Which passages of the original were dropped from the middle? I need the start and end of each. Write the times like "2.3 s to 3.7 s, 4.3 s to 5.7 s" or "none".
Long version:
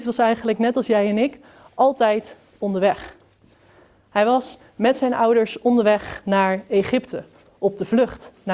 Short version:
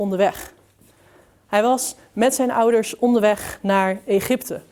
none

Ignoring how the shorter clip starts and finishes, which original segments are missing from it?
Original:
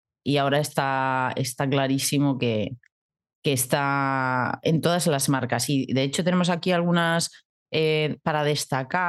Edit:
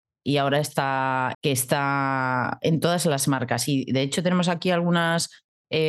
1.3 s to 3.4 s

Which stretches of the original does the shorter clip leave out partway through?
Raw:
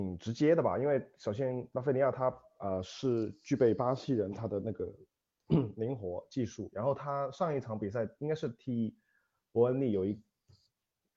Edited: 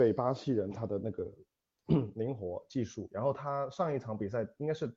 none

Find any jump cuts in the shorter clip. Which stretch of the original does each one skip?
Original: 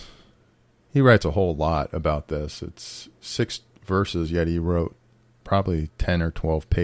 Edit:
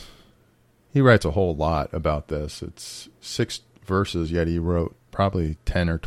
5.0 s to 5.3 s

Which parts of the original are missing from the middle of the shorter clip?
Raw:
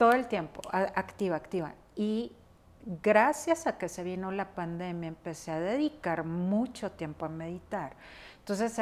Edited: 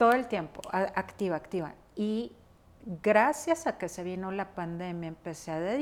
none

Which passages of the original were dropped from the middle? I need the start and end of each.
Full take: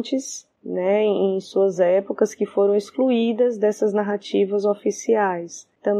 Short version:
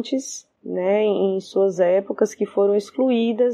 none

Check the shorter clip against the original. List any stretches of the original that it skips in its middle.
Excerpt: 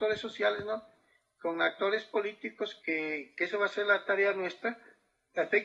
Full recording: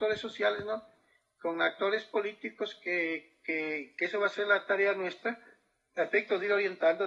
2.8 s to 3.4 s

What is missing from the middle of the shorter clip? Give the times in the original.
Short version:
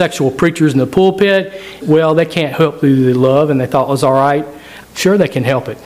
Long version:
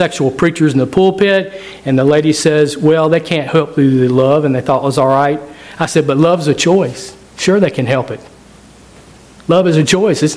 1.8 s to 2.7 s, 5.8 s to 7.2 s

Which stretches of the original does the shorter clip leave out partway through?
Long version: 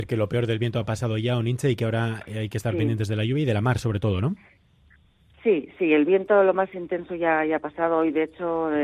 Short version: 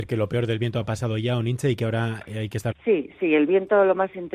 2.7 s to 5.3 s

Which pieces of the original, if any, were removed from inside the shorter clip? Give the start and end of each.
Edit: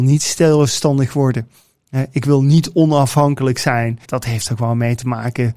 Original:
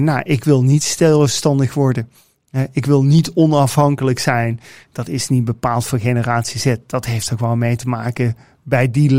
4.6 s to 6.8 s

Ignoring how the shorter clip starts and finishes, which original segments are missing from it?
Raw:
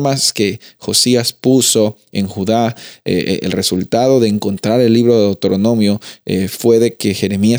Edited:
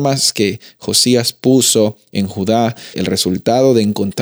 2.9 s to 3.4 s

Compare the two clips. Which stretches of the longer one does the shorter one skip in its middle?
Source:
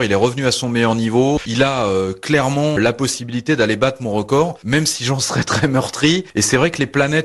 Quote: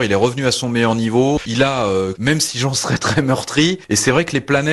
2.1 s to 4.6 s

